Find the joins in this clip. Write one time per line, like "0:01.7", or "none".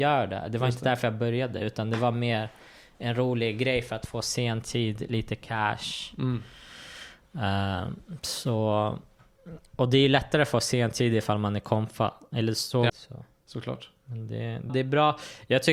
0:12.9
0:14.7